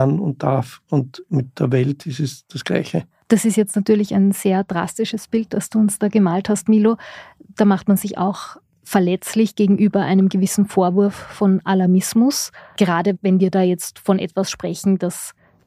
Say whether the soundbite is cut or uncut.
uncut